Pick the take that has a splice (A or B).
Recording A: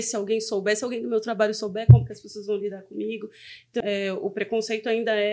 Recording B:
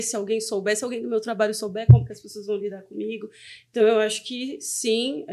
A